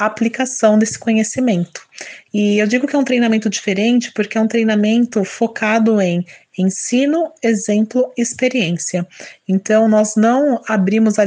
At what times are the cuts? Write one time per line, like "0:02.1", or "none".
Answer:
0:02.3